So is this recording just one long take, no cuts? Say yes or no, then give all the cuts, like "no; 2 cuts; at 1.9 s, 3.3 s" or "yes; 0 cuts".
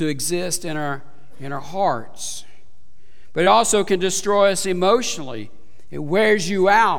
yes; 0 cuts